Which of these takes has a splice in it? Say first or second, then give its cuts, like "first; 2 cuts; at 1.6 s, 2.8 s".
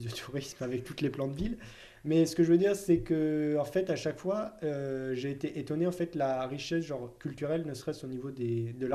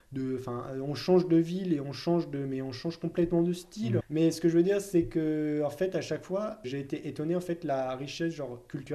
second; 2 cuts; at 4.0 s, 6.6 s